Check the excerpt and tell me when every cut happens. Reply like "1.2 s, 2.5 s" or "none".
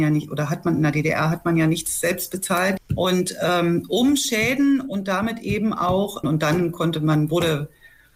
2.8 s, 6.2 s